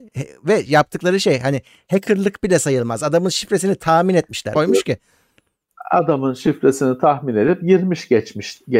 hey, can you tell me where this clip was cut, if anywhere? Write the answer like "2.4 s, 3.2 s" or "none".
4.6 s